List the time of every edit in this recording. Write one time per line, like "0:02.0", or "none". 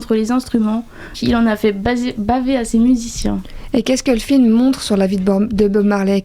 0:01.1

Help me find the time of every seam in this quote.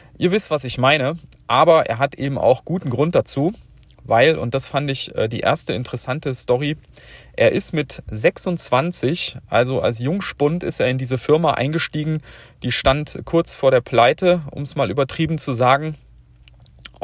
none

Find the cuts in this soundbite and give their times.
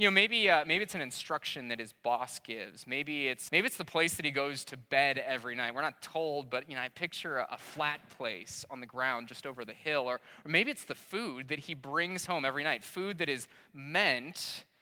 0:03.5

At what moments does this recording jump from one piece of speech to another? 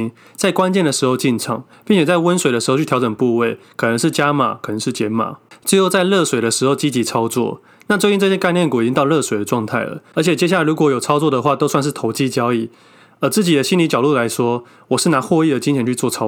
0:10.1

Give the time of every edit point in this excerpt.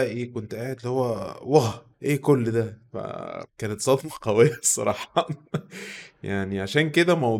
0:01.9
0:03.5

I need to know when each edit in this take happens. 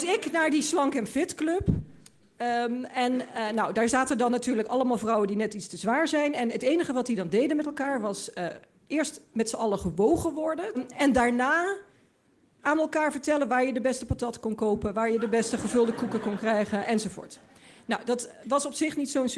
0:10.7

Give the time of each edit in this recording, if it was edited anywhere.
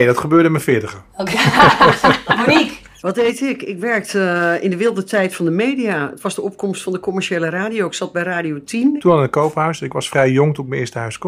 0:09.0

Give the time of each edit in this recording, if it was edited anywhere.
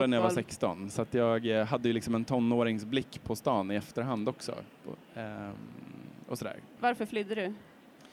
0:06.8

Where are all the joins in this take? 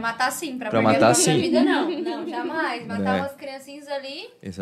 none

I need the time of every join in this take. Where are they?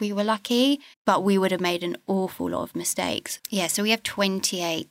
0:00.9
0:03.4

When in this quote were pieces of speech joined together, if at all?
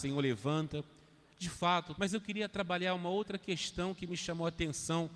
0:02.0

